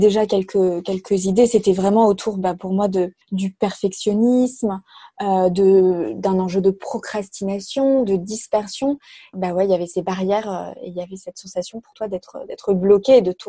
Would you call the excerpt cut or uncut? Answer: cut